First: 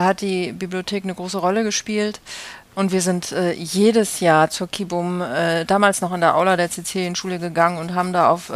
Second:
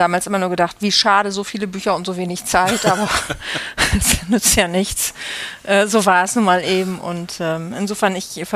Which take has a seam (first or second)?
first